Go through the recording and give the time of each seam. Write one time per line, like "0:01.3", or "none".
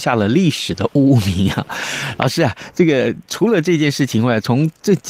none